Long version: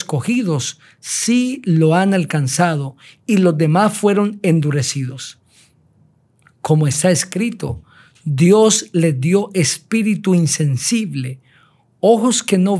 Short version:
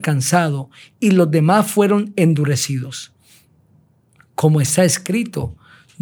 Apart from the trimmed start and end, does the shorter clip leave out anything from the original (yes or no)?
no